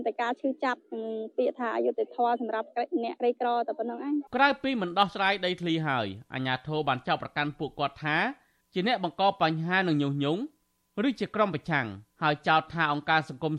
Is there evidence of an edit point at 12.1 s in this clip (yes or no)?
yes